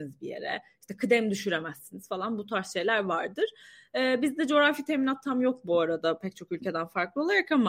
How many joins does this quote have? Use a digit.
0